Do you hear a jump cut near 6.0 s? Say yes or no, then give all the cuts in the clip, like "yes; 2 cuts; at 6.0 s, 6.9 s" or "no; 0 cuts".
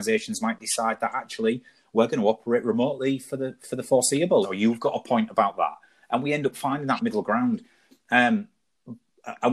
no; 1 cut; at 4.4 s